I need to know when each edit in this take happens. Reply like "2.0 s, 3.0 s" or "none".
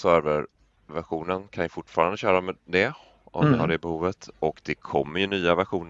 none